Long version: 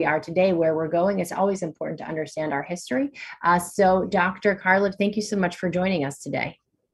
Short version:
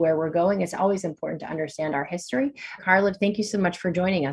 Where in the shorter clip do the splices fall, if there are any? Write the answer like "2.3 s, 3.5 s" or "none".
2.8 s